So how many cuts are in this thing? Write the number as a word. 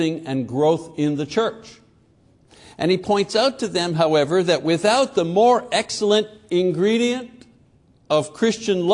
zero